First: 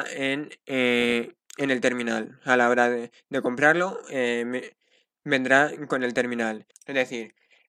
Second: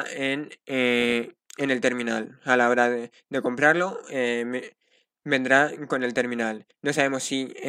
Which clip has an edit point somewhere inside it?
first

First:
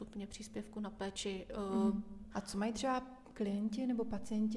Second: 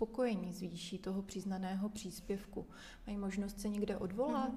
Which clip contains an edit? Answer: first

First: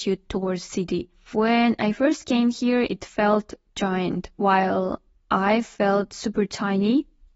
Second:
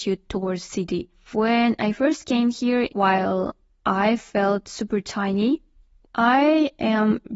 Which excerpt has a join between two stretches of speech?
second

